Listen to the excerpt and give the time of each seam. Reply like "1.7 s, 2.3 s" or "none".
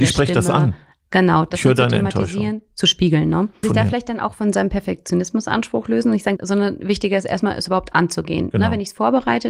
3.6 s, 6.4 s